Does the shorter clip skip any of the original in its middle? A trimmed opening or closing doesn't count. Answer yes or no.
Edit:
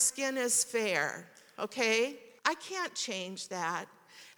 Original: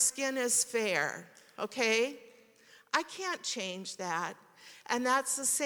yes